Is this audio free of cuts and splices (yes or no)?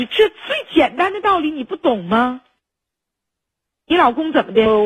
yes